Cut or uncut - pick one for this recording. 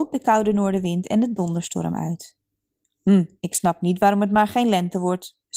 uncut